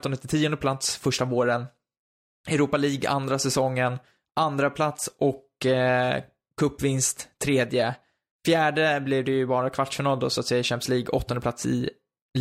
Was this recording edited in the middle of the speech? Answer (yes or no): no